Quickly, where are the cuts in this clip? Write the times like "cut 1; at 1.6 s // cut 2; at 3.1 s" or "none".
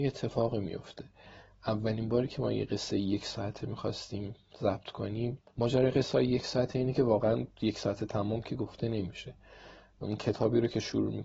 cut 1; at 5.5 s